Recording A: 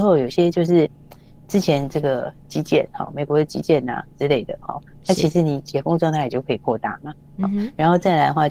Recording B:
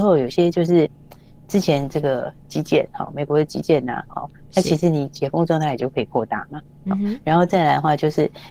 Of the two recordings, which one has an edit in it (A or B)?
B